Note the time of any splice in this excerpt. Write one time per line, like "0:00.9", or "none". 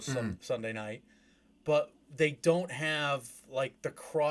none